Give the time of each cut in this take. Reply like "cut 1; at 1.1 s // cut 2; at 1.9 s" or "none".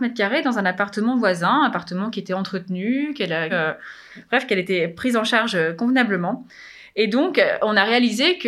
cut 1; at 3.5 s